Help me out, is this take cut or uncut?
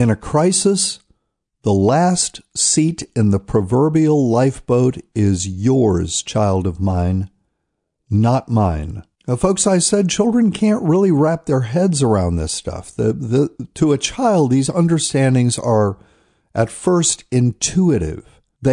uncut